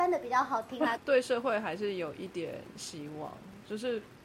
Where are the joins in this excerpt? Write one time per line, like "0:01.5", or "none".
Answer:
0:01.0